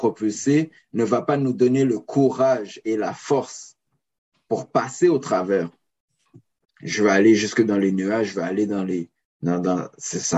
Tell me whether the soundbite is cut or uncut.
cut